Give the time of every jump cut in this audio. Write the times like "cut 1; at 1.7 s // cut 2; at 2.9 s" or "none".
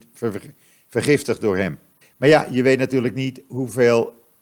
cut 1; at 2.0 s